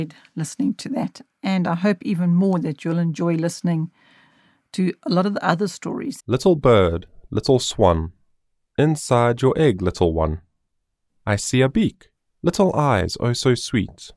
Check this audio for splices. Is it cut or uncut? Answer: cut